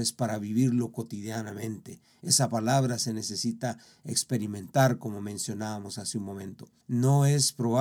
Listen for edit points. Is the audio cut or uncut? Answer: cut